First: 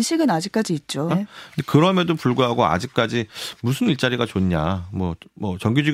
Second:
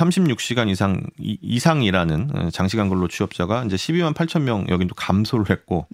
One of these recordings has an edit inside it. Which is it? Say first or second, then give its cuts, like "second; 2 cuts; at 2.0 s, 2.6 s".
first; 1 cut; at 1.1 s